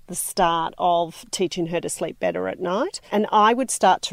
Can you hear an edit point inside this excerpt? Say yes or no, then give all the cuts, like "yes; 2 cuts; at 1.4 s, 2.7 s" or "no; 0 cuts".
yes; 1 cut; at 3.1 s